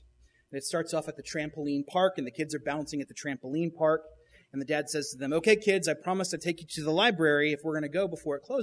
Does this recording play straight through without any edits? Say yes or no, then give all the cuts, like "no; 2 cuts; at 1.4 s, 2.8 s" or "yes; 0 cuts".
yes; 0 cuts